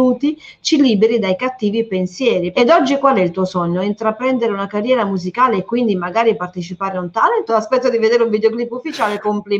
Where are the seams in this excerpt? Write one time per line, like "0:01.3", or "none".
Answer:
0:02.5
0:07.5